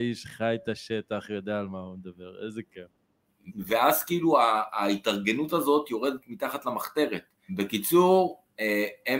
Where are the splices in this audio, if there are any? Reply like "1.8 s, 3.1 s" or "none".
3.5 s, 7.5 s